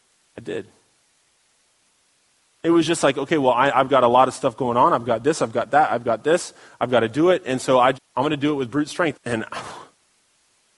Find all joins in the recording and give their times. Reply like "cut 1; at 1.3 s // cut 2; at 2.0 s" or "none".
cut 1; at 7.9 s // cut 2; at 9.1 s